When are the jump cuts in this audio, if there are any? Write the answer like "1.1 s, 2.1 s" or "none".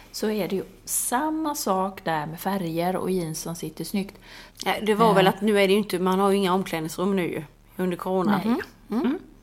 4.5 s, 8.4 s